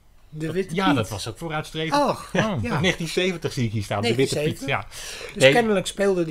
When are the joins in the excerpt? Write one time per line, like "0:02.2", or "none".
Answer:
0:01.3